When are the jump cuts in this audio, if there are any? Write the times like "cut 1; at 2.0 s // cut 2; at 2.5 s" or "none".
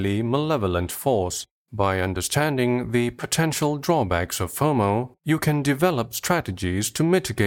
cut 1; at 1.6 s